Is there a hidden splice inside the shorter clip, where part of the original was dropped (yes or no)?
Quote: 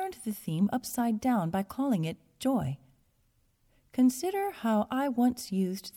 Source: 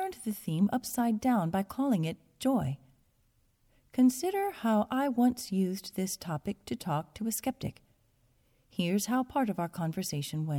no